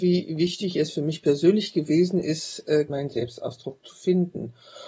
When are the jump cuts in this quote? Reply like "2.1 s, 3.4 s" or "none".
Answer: 2.9 s